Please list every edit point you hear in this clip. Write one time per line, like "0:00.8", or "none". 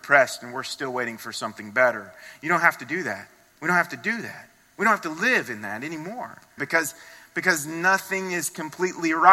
0:06.6